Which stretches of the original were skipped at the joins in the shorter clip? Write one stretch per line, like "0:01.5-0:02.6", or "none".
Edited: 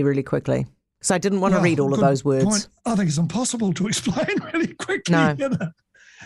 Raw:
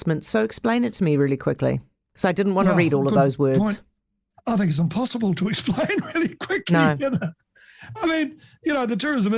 0:03.9-0:04.4